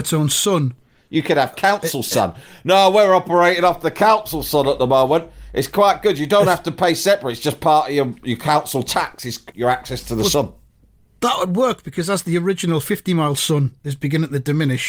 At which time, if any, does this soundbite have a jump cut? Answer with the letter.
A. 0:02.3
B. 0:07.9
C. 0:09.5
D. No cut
C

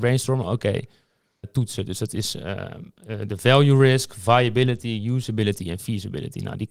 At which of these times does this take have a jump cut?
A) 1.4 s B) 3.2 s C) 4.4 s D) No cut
A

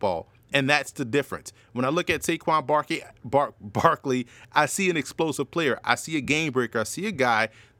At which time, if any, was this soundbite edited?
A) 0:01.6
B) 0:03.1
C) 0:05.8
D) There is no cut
D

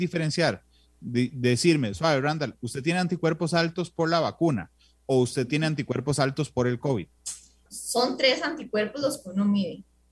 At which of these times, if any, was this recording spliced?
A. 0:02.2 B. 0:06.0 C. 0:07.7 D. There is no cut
C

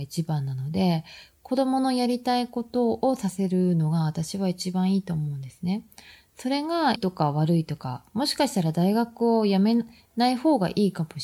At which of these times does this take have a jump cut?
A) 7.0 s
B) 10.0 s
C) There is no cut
A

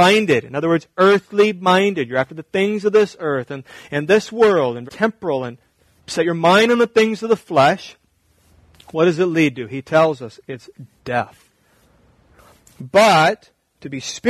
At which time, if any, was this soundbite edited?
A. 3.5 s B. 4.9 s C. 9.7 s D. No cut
B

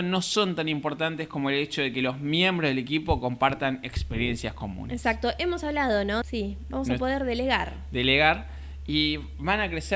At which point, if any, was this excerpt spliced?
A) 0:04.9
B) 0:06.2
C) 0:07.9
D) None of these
B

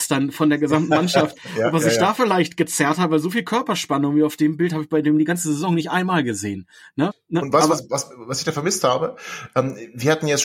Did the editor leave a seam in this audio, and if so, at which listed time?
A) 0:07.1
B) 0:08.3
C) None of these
A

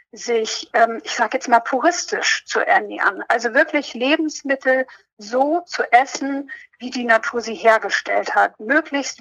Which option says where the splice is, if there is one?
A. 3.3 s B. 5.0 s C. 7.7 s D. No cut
D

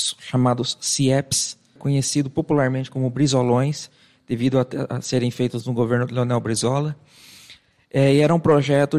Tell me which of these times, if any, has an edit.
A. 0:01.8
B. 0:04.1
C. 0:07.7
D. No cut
A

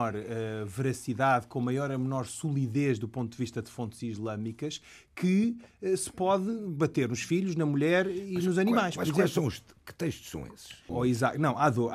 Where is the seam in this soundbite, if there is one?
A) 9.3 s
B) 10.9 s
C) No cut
B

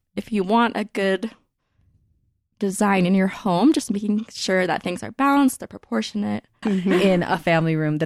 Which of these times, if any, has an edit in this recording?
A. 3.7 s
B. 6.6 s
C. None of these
B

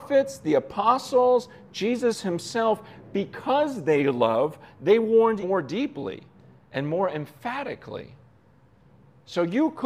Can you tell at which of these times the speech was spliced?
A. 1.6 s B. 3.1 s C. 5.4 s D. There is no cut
C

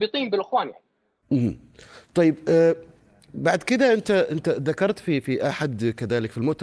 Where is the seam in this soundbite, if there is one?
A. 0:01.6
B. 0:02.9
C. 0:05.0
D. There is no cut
D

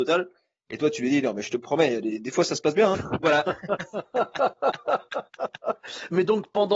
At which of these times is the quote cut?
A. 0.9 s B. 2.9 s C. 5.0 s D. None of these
B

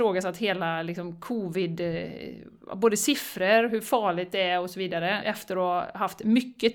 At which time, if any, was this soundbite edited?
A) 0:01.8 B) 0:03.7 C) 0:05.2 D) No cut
C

